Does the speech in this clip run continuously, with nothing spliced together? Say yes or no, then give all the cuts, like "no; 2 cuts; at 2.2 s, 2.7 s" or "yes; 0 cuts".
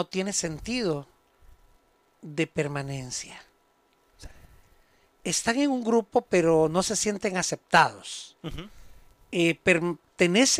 yes; 0 cuts